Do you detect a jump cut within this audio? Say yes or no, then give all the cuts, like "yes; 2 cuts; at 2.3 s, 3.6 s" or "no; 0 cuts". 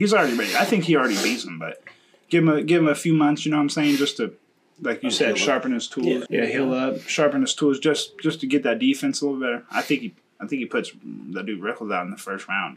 yes; 1 cut; at 6.3 s